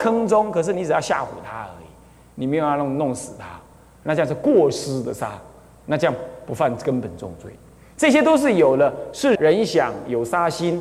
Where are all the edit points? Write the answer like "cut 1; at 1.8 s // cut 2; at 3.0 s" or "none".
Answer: cut 1; at 9.3 s